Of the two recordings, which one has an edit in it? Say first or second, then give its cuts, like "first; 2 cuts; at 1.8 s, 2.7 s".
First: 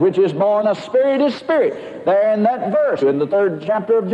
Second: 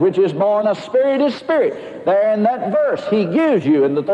first; 1 cut; at 3.0 s